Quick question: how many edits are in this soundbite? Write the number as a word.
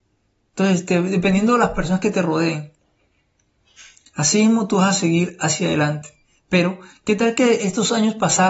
one